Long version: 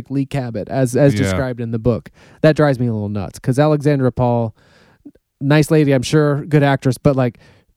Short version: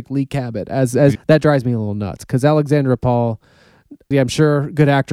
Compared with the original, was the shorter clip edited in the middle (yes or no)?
yes